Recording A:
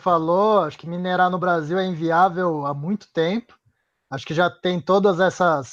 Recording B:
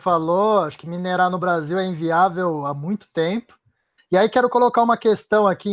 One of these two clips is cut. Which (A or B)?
B